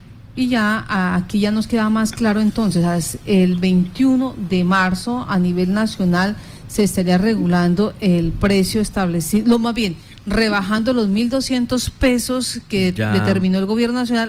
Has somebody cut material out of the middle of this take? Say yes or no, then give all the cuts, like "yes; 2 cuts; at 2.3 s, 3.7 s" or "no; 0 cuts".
no; 0 cuts